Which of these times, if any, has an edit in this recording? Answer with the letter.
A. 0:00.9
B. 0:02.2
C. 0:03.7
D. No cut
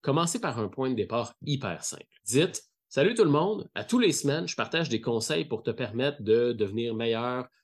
B